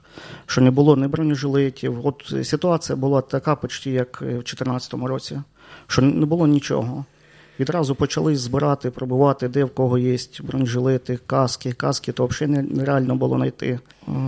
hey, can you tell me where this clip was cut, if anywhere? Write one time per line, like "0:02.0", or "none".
none